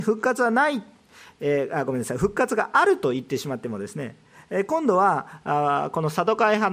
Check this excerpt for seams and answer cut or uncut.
uncut